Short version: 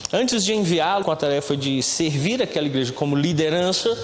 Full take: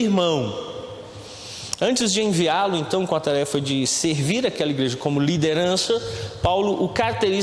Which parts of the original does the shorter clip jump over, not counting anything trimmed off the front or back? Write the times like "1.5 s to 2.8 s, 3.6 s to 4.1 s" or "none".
2.7 s to 3.1 s